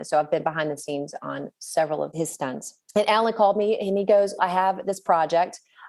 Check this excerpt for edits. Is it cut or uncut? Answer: cut